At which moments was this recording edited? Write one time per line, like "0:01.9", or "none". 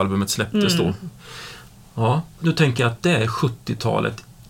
0:02.4